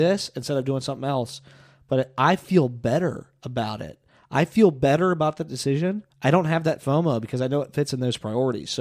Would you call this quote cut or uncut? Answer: cut